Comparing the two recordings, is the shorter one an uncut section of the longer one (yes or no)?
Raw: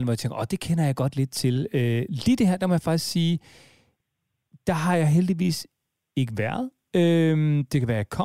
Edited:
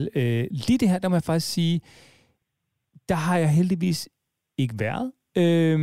yes